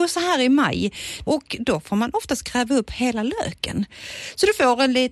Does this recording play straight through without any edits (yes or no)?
no